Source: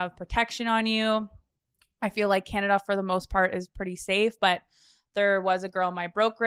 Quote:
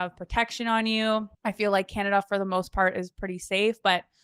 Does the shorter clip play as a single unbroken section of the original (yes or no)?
no